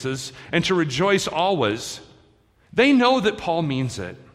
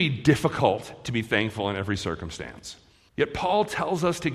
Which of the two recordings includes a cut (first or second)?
second